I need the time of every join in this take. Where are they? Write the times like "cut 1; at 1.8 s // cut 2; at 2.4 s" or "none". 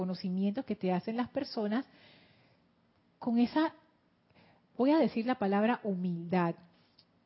none